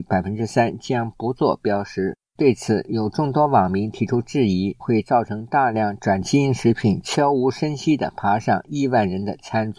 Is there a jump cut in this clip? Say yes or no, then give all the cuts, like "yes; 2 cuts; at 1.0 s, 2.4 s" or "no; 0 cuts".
yes; 1 cut; at 4.8 s